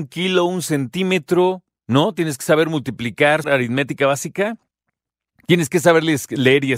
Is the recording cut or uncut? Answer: cut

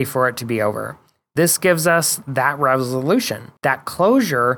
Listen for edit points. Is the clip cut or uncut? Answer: cut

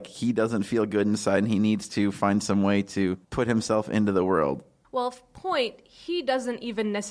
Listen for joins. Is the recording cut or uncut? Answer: cut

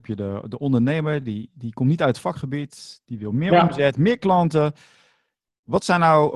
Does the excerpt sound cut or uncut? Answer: uncut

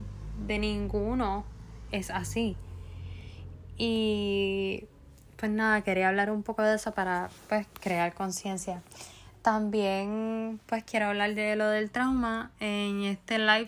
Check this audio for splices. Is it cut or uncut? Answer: uncut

